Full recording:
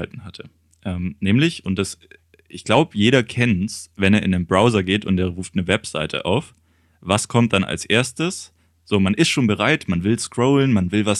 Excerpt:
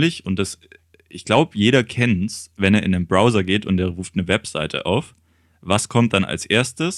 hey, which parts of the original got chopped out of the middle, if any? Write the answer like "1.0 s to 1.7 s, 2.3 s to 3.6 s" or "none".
none